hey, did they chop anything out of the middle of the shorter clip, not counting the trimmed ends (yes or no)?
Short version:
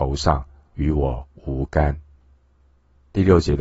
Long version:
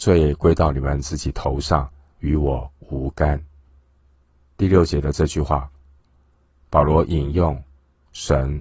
no